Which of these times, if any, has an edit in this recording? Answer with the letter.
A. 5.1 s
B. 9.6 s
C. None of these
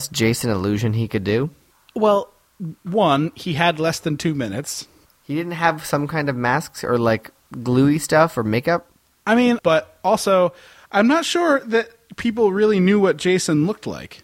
B